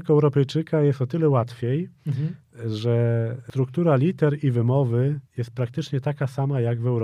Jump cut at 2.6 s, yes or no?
no